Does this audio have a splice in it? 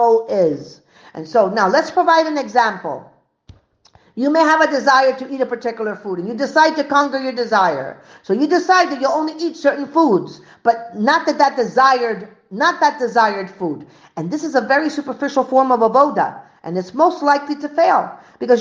no; 0 cuts

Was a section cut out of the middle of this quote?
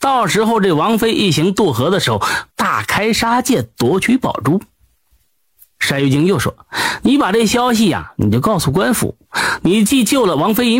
yes; 1 cut; at 2.5 s

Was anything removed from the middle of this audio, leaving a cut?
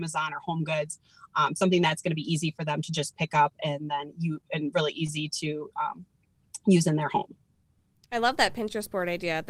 no; 0 cuts

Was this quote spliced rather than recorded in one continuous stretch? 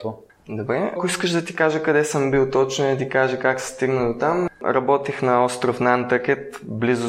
yes; 1 cut; at 1.0 s

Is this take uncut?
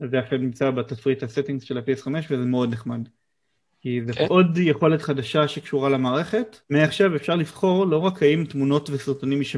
no; 2 cuts; at 4.3 s, 6.6 s

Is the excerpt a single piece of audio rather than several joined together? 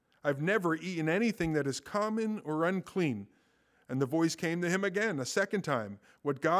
yes; 0 cuts

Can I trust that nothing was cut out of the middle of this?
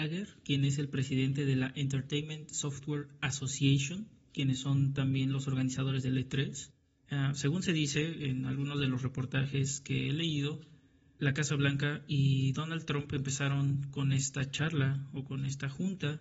no; 2 cuts; at 6.9 s, 11.2 s

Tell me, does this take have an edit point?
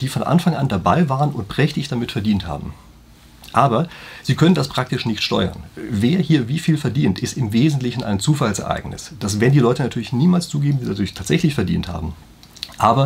no; 0 cuts

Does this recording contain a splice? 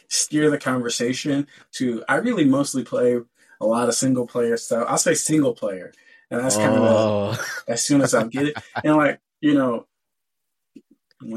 no; 0 cuts

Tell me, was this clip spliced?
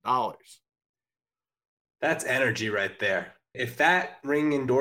yes; 1 cut; at 3.5 s

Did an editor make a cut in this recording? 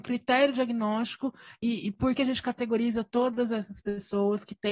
yes; 1 cut; at 2.2 s

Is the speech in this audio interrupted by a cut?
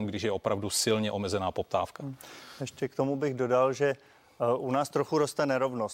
no; 0 cuts

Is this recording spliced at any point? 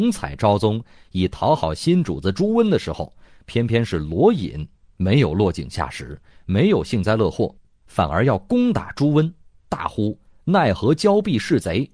no; 0 cuts

